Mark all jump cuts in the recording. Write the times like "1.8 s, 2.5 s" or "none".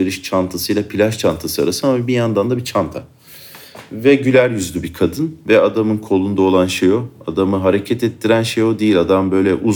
none